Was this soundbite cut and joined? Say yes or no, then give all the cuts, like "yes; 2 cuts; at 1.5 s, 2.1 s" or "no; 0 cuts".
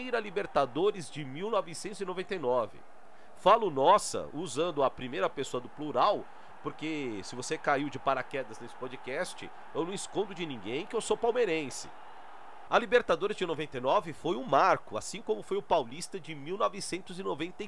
yes; 1 cut; at 12.7 s